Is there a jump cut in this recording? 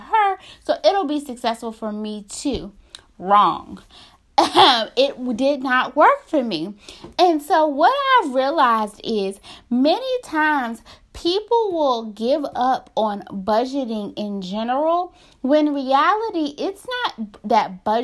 no; 0 cuts

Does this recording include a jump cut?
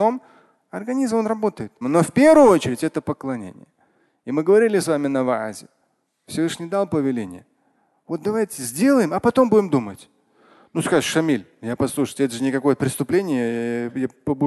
yes; 1 cut; at 1.8 s

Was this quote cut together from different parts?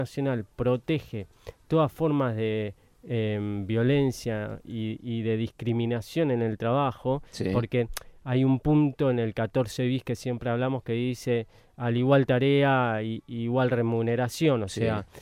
no; 0 cuts

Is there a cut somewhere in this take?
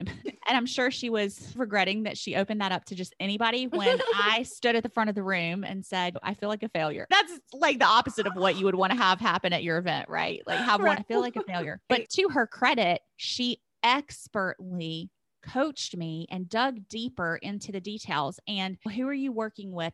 yes; 2 cuts; at 10.9 s, 12.0 s

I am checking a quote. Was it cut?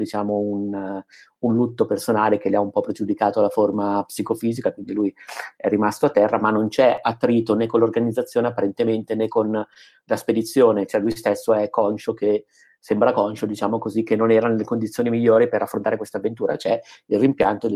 no; 0 cuts

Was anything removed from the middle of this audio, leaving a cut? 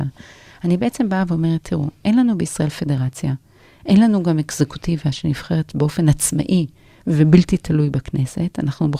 no; 0 cuts

